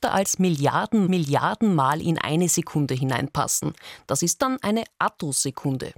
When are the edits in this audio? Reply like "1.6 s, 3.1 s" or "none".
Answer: none